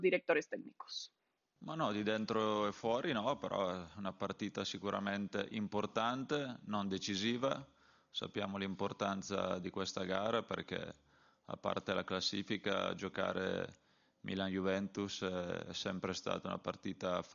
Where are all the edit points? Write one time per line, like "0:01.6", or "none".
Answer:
none